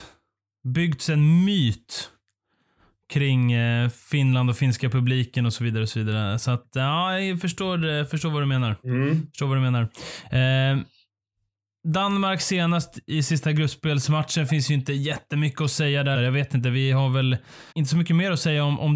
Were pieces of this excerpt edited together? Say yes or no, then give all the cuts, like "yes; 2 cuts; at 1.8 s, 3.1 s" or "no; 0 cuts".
yes; 2 cuts; at 16.2 s, 17.7 s